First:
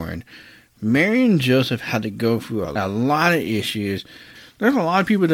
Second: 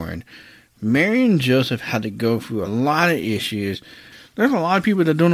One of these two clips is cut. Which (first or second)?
second